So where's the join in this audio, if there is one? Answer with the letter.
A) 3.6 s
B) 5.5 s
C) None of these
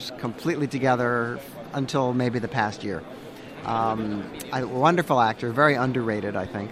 C